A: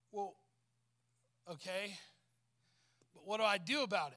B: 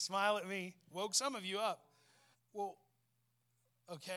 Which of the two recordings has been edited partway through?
B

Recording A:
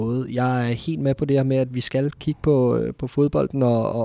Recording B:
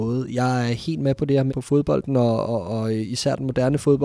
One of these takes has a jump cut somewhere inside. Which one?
B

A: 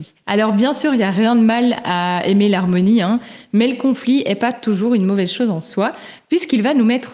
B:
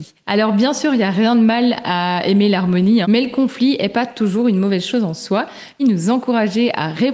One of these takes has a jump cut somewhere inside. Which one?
B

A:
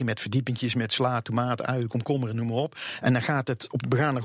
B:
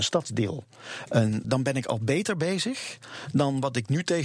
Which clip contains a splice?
B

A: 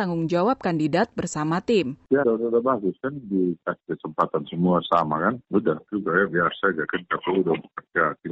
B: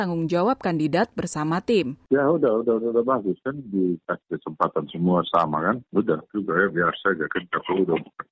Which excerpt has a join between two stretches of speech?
A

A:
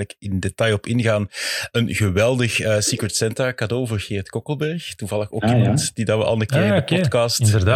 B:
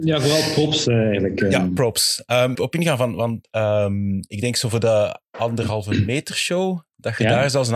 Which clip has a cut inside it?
B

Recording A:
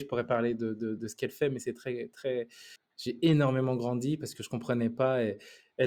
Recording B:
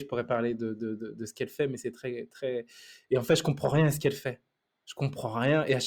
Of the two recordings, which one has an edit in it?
A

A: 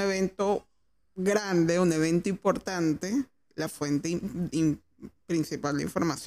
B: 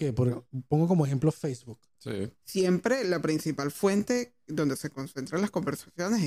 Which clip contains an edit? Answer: B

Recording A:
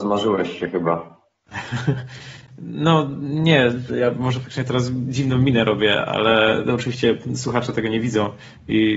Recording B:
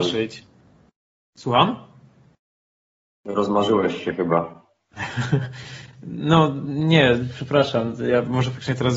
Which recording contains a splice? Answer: A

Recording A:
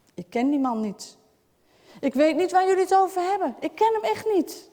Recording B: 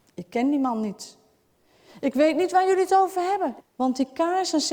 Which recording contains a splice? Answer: B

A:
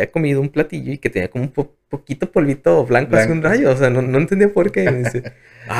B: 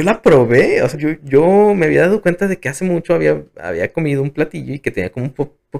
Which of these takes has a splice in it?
B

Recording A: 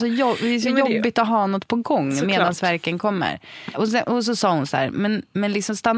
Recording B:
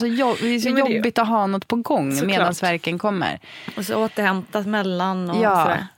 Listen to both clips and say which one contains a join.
A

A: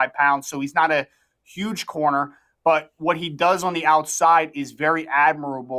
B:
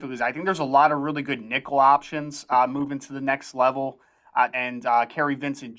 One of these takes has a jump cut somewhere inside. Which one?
B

